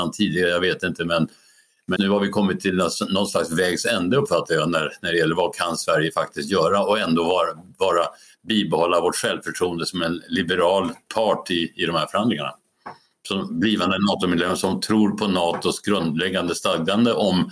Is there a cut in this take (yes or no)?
yes